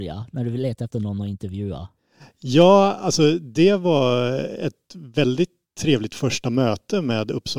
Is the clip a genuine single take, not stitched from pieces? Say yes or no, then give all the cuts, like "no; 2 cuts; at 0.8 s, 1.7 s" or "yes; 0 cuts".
yes; 0 cuts